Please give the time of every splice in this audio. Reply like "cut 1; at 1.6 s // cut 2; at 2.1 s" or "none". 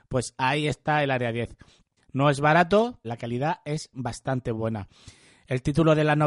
cut 1; at 2.0 s // cut 2; at 3.0 s